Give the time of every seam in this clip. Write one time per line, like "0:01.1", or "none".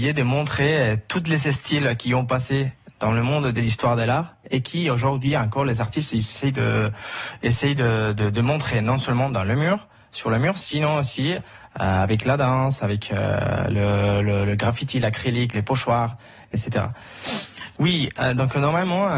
0:15.5
0:17.7